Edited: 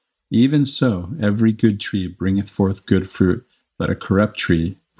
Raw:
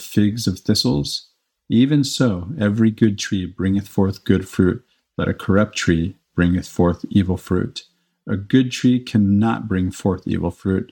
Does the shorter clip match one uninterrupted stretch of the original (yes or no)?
yes